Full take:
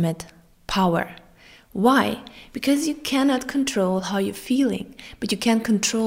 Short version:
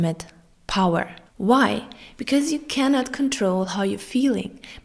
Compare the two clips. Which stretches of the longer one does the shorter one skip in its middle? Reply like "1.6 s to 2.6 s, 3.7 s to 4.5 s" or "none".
1.3 s to 1.6 s